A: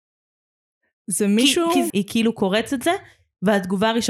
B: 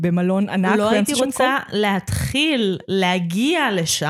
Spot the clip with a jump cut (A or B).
A